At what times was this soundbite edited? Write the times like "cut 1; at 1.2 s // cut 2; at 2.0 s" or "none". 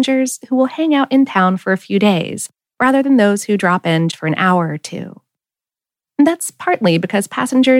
cut 1; at 4.1 s